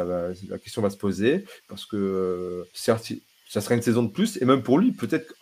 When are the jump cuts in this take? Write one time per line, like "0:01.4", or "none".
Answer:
0:01.6
0:02.7